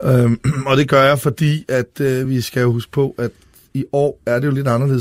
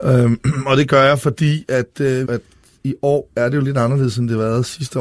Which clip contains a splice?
second; 1 cut; at 2.2 s

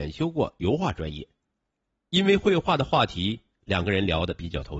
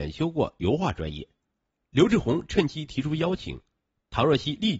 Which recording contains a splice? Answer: second; 1 cut; at 1.8 s

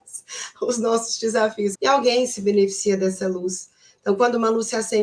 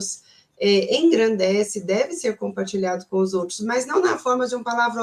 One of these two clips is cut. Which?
first; 1 cut; at 1.7 s

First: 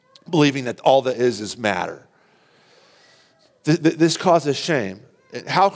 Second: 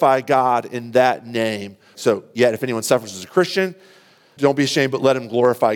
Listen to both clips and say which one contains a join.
second; 2 cuts; at 1.9 s, 4.4 s

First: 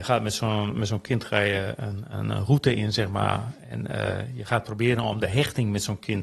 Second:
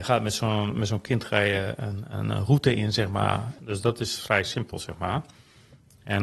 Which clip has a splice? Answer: second; 1 cut; at 3.6 s

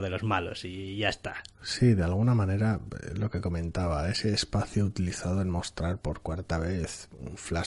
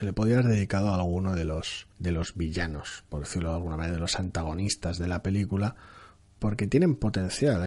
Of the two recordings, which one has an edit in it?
second; 2 cuts; at 1.9 s, 6.4 s

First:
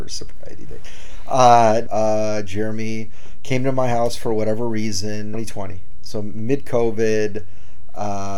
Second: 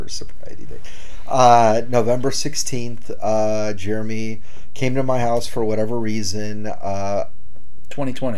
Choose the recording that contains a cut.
first; 2 cuts; at 1.9 s, 5.3 s

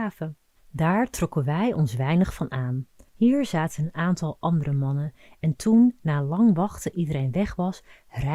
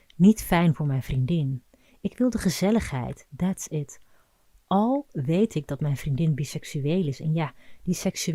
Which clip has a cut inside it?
first; 1 cut; at 3.1 s

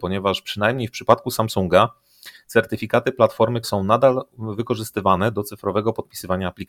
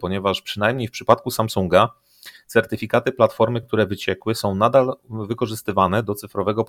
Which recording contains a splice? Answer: first; 1 cut; at 3.6 s

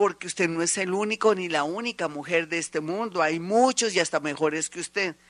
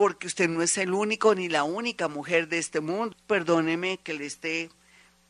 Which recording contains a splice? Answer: second; 1 cut; at 3.1 s

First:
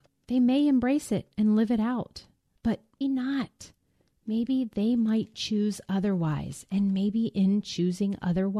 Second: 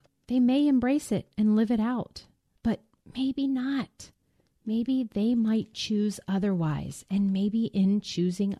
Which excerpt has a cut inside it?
first; 1 cut; at 3.0 s

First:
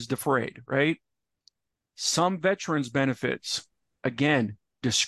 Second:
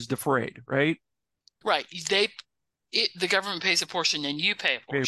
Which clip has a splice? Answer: second; 1 cut; at 1.6 s

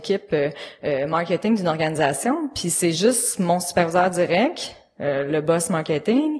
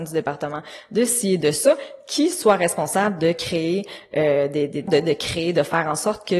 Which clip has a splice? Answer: second; 1 cut; at 4.9 s

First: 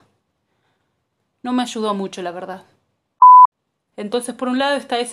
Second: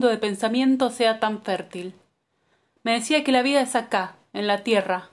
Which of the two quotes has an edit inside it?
first; 1 cut; at 3.9 s

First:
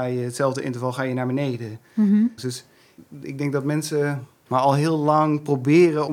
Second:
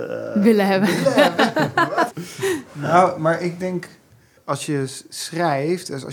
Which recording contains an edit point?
first; 1 cut; at 2.4 s

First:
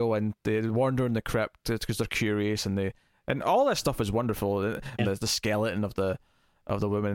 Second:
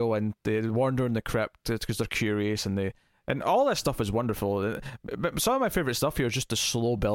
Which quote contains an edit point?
first; 1 cut; at 5.0 s

